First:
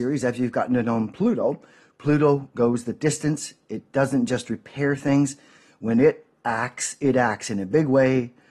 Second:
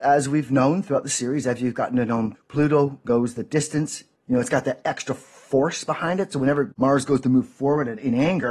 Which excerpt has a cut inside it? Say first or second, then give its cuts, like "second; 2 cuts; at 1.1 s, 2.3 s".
second; 2 cuts; at 2.3 s, 4.1 s